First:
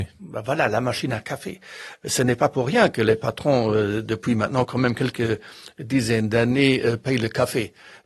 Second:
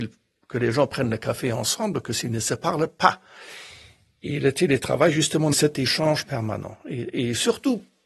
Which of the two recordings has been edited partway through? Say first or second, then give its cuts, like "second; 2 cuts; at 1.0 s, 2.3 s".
second; 1 cut; at 5.5 s